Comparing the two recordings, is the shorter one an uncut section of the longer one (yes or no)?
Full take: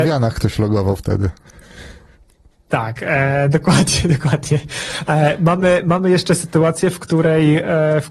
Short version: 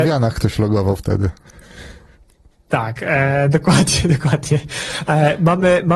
yes